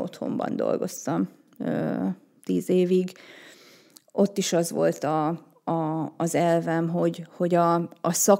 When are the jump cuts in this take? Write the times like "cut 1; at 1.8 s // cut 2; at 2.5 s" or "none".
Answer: none